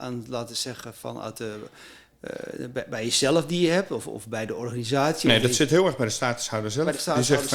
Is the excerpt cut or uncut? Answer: uncut